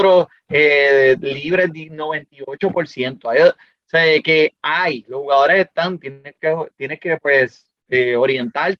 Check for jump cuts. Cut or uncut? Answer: uncut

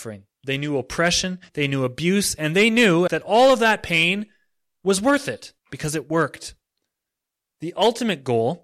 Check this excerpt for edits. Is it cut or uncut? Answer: cut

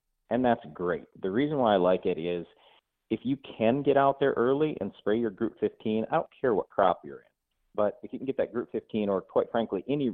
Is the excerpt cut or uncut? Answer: uncut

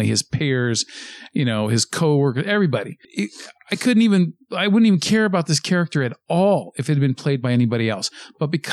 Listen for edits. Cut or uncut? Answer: uncut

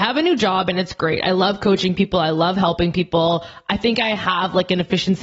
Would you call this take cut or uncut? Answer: uncut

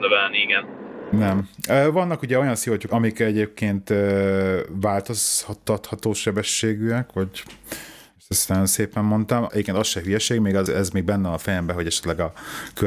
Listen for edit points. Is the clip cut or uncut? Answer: cut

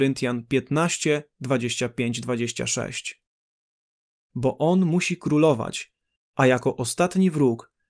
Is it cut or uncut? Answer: cut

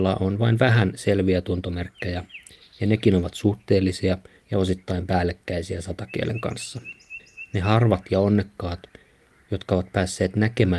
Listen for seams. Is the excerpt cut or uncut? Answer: uncut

